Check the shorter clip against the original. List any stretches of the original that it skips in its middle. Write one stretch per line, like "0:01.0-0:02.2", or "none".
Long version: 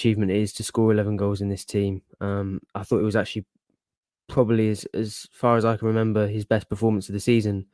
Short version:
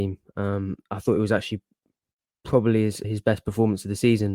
0:04.9-0:06.3